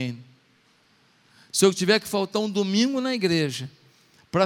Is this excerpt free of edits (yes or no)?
yes